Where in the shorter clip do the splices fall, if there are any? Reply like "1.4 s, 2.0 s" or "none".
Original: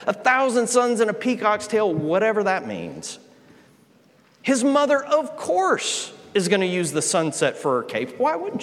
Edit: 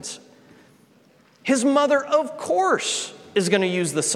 none